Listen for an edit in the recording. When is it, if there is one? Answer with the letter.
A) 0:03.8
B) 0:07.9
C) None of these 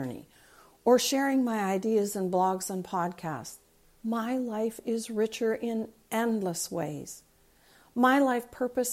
A